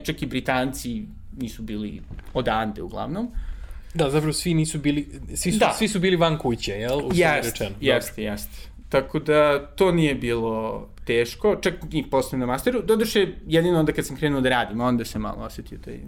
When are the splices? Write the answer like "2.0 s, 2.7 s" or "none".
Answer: none